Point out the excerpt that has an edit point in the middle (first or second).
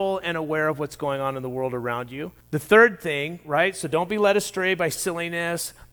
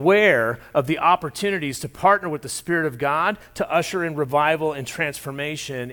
first